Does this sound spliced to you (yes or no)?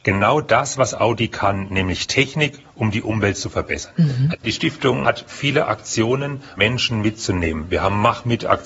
yes